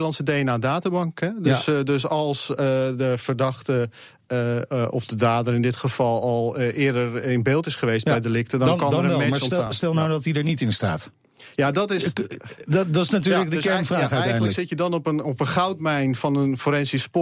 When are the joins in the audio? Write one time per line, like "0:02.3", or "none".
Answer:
none